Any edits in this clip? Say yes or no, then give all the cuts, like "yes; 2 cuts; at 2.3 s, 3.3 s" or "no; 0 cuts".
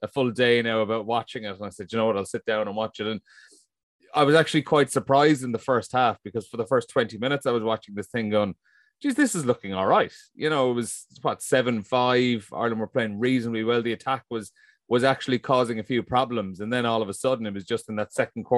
no; 0 cuts